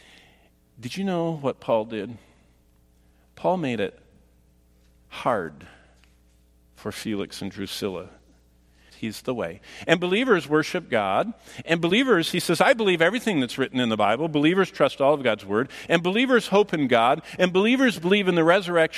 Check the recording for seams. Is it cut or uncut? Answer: cut